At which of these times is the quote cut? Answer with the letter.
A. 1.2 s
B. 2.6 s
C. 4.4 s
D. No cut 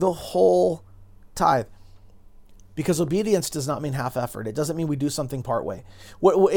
D